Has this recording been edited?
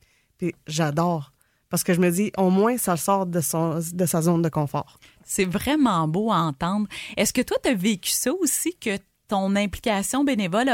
no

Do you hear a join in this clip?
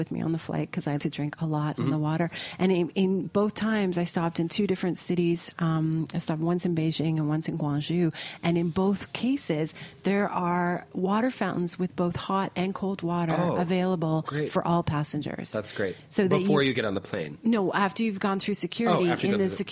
yes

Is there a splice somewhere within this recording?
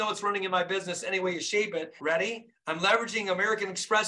yes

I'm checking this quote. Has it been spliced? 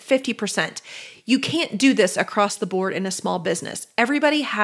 no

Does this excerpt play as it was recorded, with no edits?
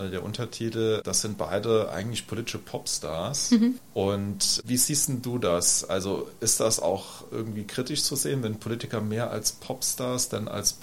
yes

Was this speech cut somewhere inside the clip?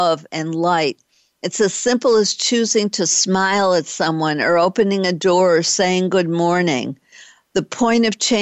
no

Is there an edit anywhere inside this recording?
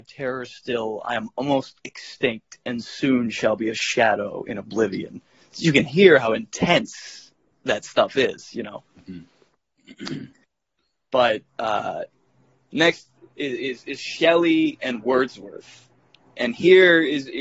no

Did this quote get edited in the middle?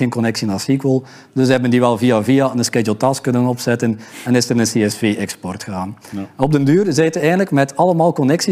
no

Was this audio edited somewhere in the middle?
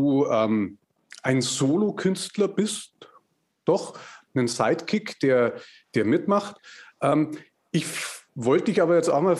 yes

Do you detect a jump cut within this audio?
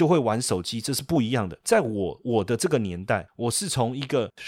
no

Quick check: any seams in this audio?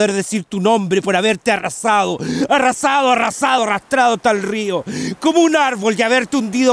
yes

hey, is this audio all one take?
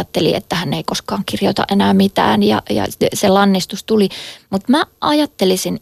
yes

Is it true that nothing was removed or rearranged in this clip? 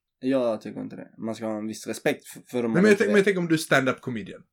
no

